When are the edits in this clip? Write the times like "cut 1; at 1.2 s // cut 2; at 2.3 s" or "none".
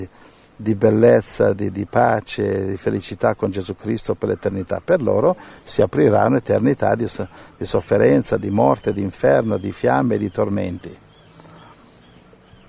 none